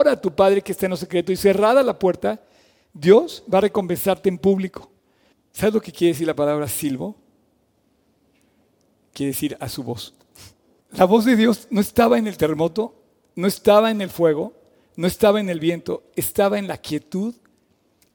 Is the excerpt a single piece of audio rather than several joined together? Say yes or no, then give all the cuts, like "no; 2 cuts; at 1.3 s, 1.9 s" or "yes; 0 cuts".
no; 2 cuts; at 5.3 s, 10.8 s